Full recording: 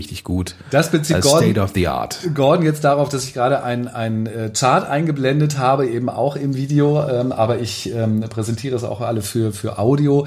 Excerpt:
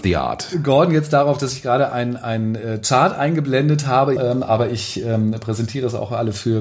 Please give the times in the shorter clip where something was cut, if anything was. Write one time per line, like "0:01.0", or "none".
0:04.2